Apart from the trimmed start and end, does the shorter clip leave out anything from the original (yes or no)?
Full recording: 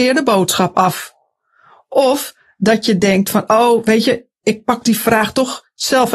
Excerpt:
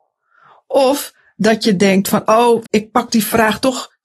yes